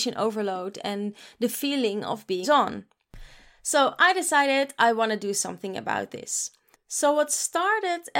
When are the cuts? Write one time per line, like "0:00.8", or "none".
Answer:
0:02.4
0:06.7